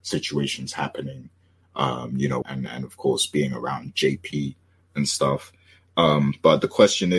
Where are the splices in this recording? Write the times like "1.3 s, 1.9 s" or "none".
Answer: 2.4 s